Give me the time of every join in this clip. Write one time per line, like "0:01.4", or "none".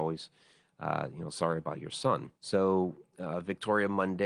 0:02.4